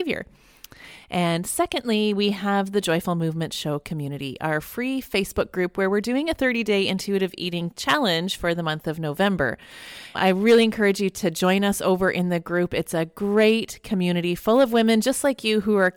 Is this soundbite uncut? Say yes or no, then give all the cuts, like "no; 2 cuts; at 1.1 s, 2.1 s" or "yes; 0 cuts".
yes; 0 cuts